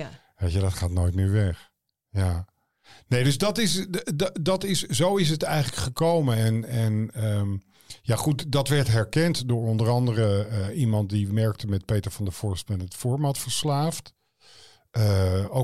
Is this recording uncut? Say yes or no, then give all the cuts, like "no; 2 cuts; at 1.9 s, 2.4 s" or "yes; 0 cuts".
yes; 0 cuts